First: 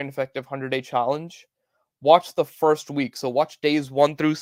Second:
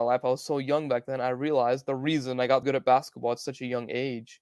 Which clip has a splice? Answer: second; 1 cut; at 2.6 s

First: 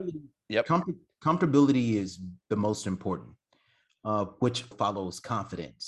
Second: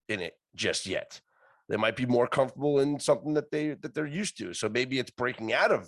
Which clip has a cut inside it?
first; 1 cut; at 4.7 s

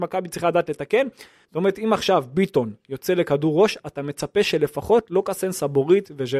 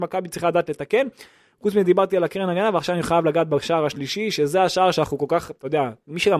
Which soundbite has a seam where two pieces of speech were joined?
first; 1 cut; at 1.4 s

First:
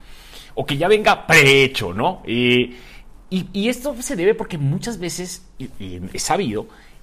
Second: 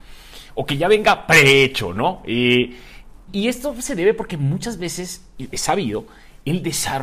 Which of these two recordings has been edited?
second; 2 cuts; at 3.3 s, 5.5 s

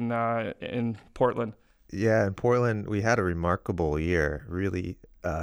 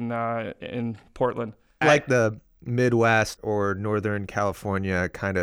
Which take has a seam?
second; 2 cuts; at 1.8 s, 3.4 s

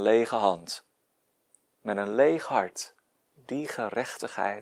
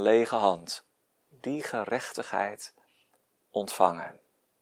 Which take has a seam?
second; 1 cut; at 1.2 s

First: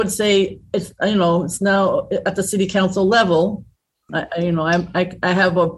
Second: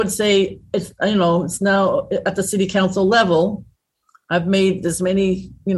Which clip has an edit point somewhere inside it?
first; 1 cut; at 4.1 s

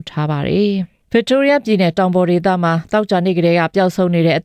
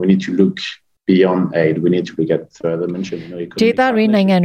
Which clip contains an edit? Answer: first; 1 cut; at 1.0 s

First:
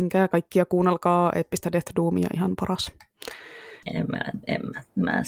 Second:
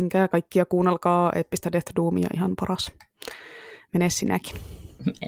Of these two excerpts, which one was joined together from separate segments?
first; 1 cut; at 3.8 s

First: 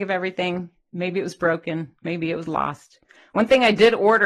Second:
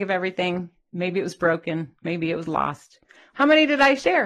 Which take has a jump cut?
second; 1 cut; at 3.3 s

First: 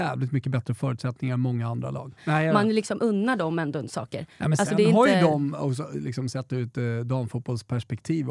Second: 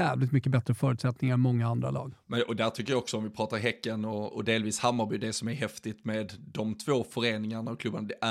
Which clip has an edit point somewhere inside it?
first; 1 cut; at 2.2 s

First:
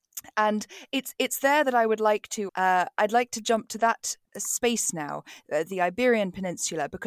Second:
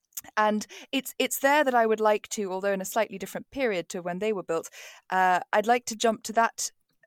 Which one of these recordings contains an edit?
first; 2 cuts; at 2.5 s, 4.3 s

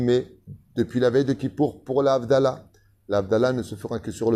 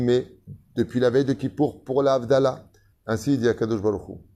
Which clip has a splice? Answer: second; 1 cut; at 2.9 s

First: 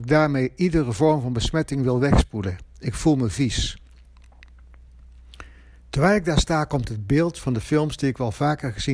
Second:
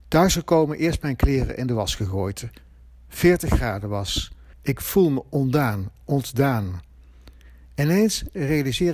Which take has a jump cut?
second; 1 cut; at 4.5 s

